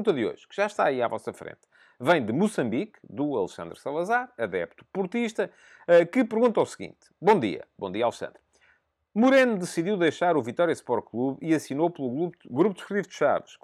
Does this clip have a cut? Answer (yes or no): no